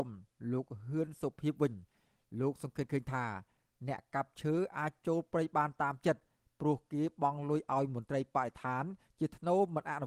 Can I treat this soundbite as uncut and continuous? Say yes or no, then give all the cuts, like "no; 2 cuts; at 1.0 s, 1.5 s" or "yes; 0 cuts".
yes; 0 cuts